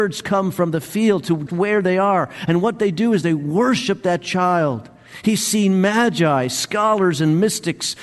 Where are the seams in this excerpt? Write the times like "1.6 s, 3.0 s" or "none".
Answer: 1.5 s